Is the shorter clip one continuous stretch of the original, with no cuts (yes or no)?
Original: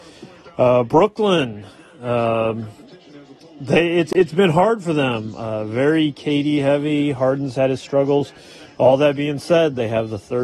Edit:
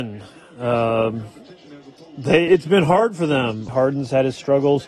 no